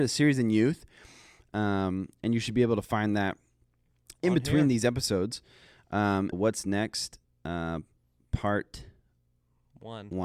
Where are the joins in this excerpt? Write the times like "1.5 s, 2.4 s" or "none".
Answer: 6.3 s